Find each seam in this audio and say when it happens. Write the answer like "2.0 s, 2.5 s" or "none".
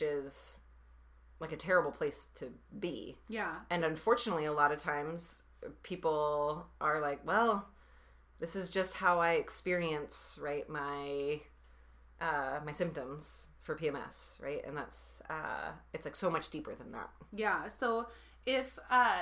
none